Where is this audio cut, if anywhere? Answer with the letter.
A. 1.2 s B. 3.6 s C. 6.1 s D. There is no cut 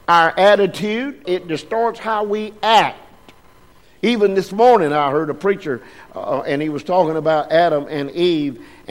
A